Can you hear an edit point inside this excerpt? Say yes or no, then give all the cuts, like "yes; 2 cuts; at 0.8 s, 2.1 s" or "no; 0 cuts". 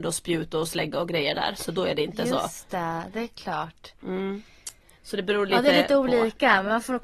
no; 0 cuts